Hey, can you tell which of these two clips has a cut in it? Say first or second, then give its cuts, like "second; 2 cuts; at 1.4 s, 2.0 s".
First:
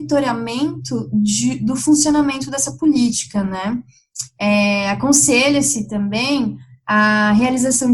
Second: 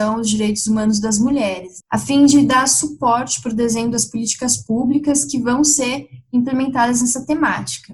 second; 1 cut; at 1.8 s